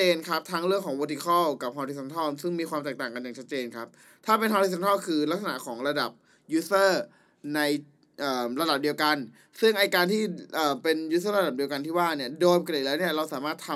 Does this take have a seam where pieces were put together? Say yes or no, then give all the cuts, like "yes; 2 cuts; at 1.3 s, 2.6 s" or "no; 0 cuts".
no; 0 cuts